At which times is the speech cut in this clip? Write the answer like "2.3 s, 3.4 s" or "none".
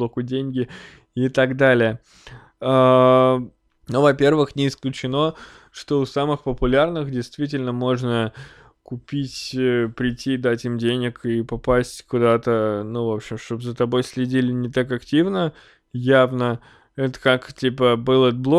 3.7 s